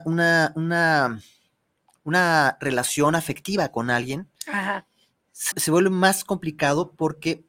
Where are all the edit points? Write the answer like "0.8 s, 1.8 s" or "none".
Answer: 5.5 s